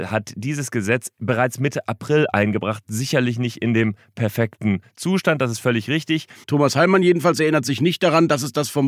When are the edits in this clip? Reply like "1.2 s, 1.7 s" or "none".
6.4 s

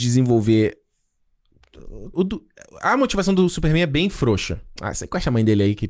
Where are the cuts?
2.1 s, 4.8 s

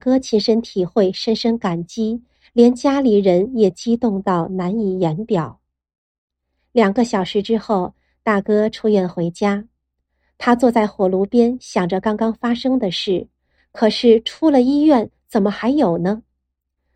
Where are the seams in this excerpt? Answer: 13.6 s

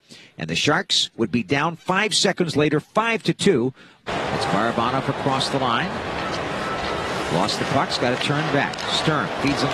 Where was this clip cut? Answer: 4.0 s

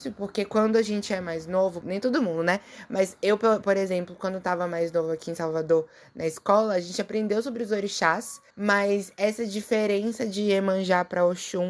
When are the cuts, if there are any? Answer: 1.8 s, 8.5 s

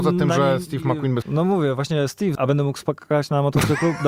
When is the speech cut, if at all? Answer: 1.2 s, 2.4 s

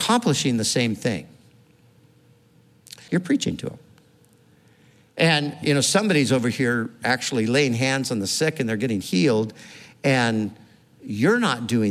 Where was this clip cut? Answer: 3.1 s

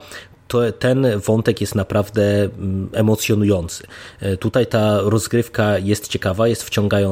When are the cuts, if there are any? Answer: none

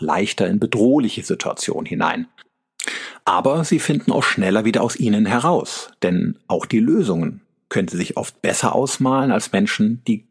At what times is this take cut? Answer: none

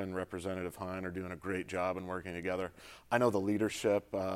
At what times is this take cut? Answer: none

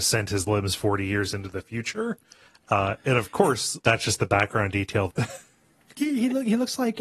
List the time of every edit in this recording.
3.8 s, 5.1 s

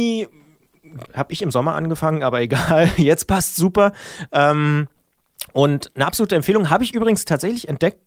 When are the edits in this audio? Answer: 1.1 s

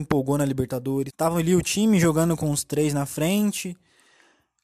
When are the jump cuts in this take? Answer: 1.1 s

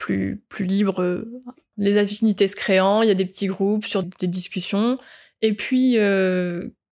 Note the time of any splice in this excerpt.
4.0 s

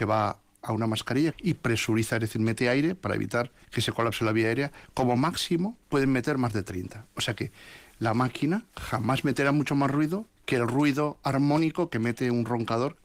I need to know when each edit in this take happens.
1.3 s

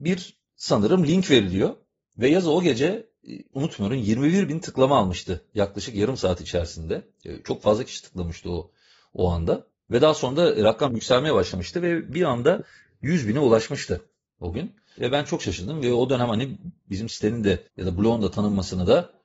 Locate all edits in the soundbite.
15.0 s, 17.7 s

